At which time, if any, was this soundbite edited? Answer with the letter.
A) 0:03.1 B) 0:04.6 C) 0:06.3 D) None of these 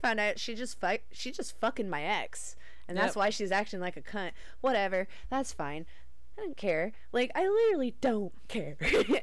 C